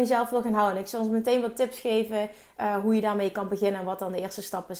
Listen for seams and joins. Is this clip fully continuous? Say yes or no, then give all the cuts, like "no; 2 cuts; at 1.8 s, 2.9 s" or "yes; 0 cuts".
yes; 0 cuts